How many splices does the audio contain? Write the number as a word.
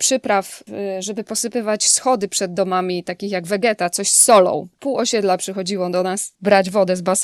one